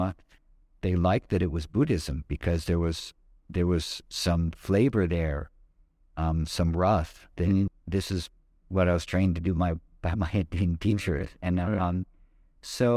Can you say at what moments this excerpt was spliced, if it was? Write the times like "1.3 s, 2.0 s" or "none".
7.7 s